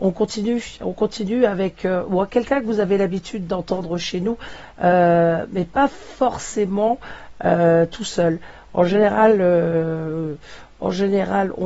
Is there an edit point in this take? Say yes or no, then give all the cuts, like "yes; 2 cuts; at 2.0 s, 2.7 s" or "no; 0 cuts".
no; 0 cuts